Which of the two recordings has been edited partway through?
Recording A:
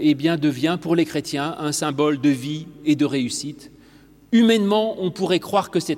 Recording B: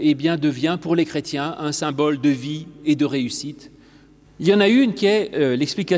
B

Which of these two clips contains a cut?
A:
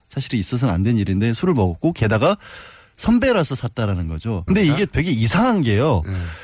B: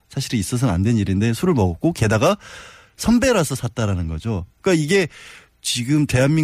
A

